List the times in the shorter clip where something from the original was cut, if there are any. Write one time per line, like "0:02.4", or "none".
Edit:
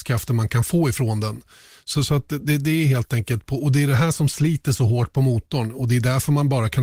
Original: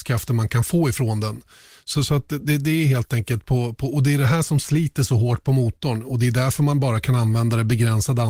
0:03.4